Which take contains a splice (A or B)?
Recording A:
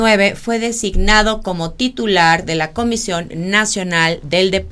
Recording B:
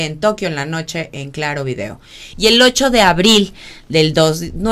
B